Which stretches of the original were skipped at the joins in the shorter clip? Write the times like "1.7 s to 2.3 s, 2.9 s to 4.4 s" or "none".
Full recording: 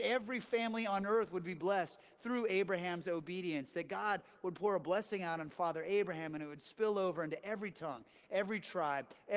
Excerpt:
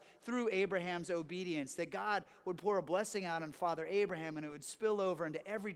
none